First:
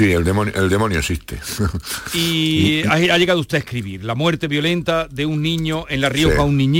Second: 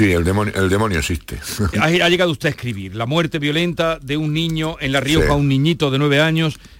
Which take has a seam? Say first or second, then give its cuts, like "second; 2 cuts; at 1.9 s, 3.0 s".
second; 1 cut; at 1.7 s